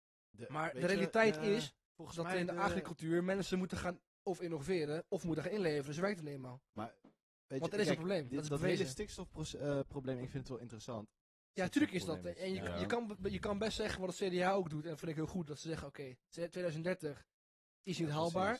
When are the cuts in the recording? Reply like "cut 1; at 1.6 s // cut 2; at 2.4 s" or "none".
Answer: cut 1; at 11.6 s